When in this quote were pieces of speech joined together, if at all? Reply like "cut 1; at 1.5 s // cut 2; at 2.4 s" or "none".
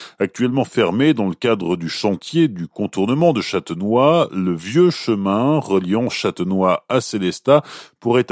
none